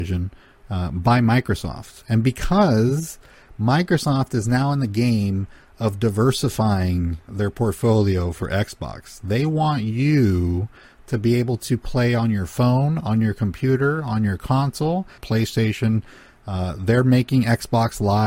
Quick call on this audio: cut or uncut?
cut